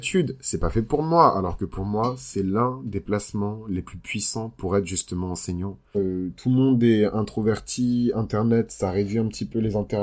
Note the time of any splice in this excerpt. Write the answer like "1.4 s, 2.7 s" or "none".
5.9 s